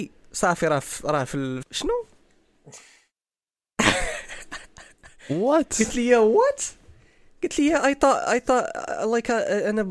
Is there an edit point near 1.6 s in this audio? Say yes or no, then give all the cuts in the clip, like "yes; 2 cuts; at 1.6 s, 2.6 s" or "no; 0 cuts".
yes; 1 cut; at 1.6 s